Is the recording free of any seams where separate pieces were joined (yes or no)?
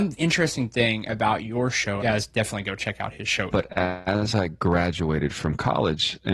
no